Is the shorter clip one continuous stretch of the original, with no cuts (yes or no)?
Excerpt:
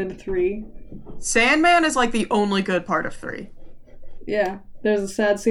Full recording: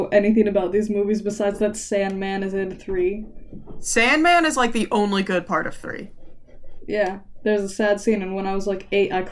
yes